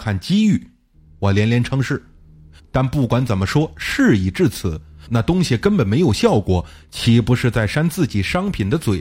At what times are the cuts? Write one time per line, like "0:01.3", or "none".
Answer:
0:00.9
0:02.6
0:05.1